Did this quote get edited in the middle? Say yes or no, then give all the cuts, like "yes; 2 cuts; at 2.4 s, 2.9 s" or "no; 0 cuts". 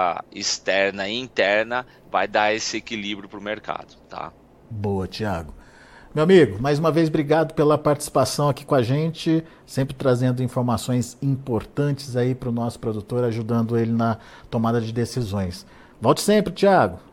no; 0 cuts